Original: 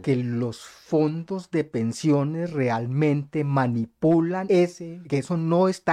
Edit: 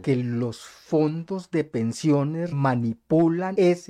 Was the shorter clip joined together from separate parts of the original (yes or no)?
yes